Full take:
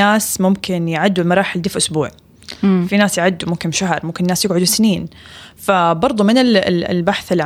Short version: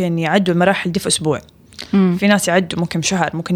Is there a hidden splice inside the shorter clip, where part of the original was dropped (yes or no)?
no